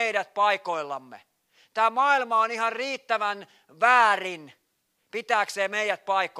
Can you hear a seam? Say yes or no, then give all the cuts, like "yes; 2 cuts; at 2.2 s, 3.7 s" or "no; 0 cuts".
no; 0 cuts